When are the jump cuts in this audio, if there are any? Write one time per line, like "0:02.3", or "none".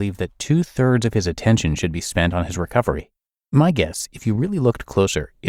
none